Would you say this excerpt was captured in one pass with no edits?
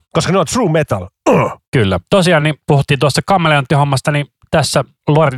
yes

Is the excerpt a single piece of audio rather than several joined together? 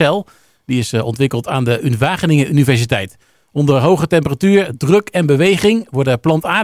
yes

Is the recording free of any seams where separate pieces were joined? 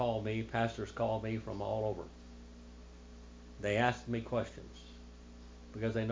yes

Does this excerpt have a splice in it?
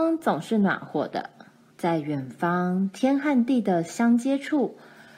yes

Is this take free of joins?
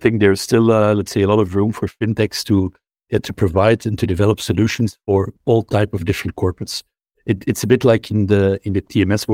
yes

